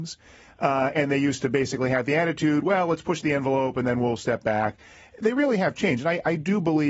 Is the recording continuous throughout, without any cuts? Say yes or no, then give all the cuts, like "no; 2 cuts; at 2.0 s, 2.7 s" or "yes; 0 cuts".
yes; 0 cuts